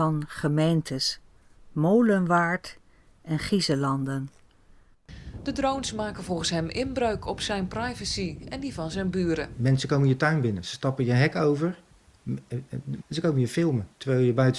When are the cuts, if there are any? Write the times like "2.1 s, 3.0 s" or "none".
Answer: 13.0 s